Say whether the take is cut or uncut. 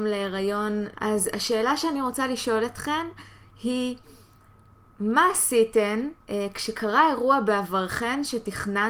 cut